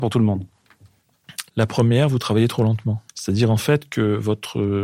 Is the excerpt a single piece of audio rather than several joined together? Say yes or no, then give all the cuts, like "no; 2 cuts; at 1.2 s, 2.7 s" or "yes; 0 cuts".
no; 2 cuts; at 1.5 s, 3.1 s